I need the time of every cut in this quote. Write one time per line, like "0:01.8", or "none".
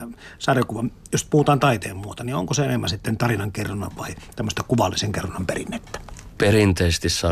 none